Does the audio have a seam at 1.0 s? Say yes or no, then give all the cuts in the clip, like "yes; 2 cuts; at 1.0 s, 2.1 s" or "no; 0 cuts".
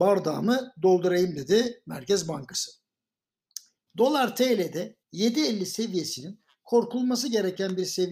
no; 2 cuts; at 3.9 s, 5.0 s